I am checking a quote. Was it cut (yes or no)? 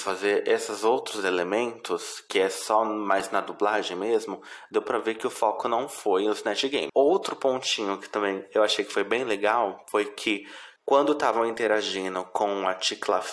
yes